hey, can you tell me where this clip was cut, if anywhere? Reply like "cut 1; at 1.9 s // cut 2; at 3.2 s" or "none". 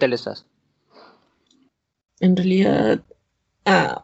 cut 1; at 2.1 s